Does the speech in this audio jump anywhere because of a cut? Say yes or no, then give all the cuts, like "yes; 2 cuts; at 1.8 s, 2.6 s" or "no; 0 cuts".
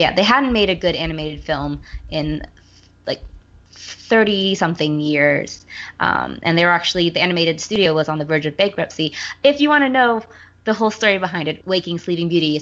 yes; 1 cut; at 11.6 s